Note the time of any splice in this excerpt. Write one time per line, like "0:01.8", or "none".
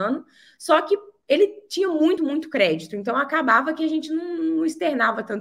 0:02.2